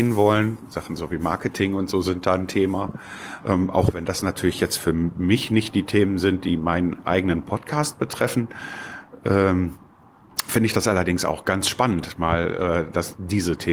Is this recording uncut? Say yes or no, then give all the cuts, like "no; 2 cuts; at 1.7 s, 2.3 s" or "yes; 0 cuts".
yes; 0 cuts